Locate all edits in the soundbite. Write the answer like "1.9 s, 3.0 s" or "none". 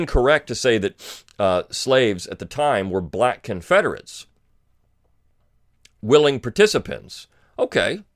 none